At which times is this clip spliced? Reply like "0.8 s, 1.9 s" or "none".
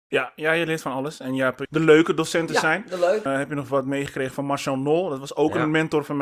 1.7 s, 3.3 s